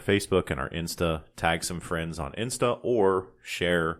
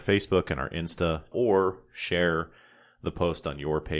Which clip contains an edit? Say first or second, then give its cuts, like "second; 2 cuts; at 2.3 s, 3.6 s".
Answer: second; 1 cut; at 1.3 s